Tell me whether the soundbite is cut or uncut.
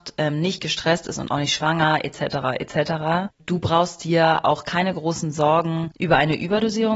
uncut